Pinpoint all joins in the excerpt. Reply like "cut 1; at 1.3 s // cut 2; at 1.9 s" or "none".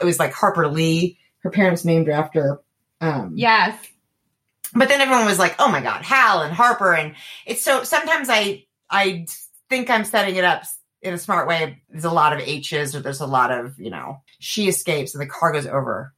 cut 1; at 11.8 s // cut 2; at 14.3 s